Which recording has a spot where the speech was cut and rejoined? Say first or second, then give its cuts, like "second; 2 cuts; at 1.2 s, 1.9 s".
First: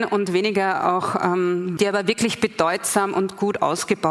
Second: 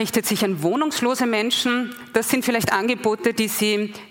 first; 1 cut; at 1.8 s